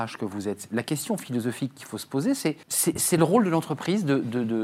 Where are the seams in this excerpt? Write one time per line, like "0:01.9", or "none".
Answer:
0:02.6